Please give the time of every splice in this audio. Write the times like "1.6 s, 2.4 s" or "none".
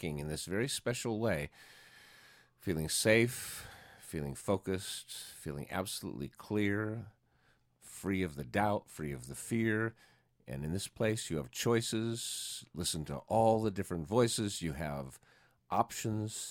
none